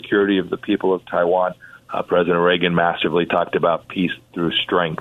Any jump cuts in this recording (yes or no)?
yes